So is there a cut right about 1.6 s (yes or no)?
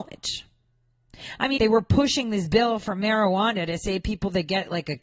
yes